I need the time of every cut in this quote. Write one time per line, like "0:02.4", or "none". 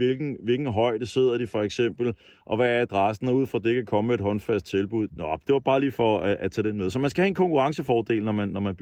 0:05.1